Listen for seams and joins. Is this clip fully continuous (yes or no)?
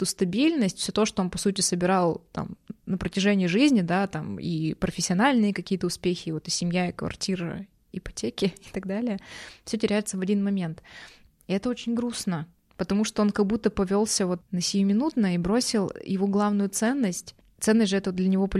no